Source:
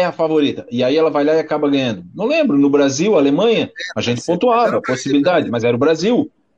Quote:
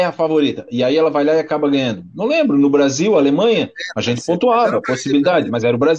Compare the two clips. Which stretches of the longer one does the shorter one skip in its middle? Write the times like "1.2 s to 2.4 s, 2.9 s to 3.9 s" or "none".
none